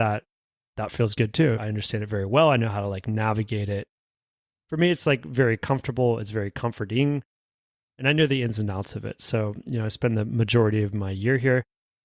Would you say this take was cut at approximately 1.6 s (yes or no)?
yes